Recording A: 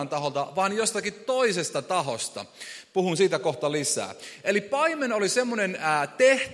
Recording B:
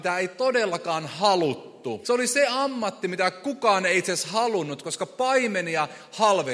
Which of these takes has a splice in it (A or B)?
B